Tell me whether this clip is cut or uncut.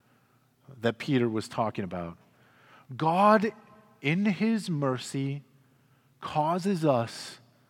uncut